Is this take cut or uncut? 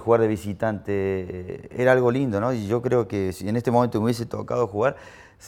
uncut